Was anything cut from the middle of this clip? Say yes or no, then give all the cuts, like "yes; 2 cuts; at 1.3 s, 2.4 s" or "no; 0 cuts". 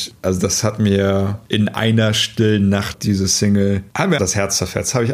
yes; 2 cuts; at 2.9 s, 4.2 s